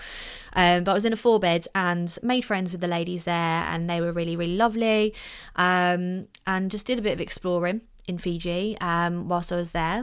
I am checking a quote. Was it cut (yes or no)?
no